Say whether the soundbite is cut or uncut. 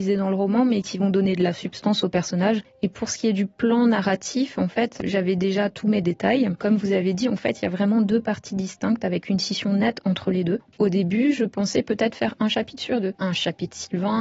uncut